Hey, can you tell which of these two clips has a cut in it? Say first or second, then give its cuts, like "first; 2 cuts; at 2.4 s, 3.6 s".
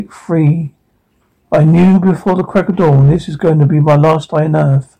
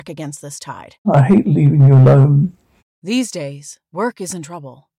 second; 2 cuts; at 1.0 s, 2.8 s